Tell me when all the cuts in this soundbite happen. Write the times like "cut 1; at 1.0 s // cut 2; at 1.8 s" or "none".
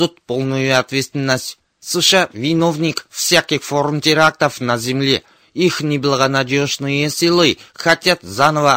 none